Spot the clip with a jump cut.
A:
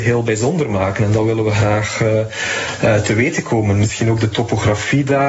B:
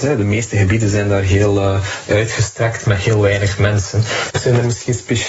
B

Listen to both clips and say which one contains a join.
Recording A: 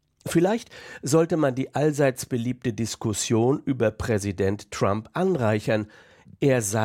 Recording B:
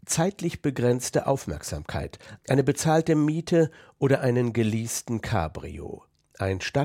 B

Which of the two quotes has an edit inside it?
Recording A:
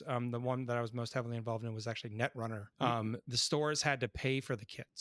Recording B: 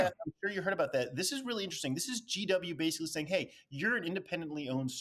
A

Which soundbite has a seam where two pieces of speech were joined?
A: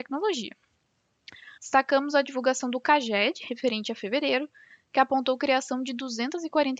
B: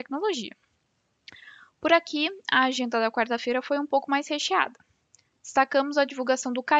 A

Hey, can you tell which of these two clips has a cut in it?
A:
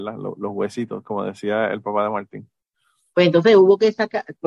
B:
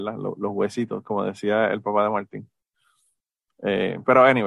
A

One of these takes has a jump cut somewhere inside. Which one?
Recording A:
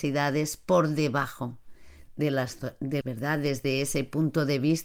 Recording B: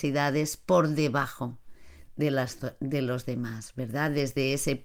A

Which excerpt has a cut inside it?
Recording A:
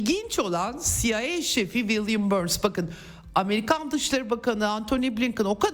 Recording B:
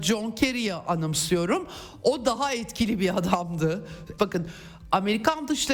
B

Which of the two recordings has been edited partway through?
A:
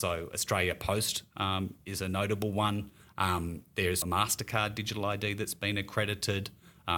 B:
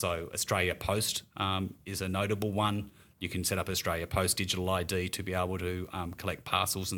A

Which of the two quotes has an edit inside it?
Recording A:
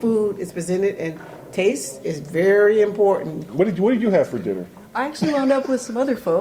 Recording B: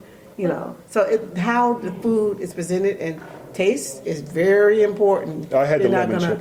A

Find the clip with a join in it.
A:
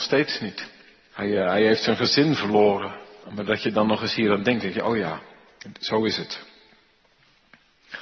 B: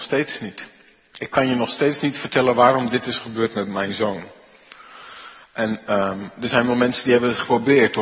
A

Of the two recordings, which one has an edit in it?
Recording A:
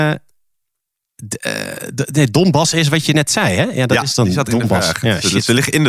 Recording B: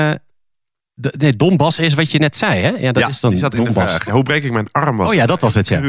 B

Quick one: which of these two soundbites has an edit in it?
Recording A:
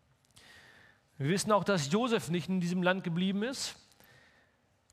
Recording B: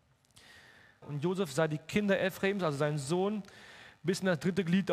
B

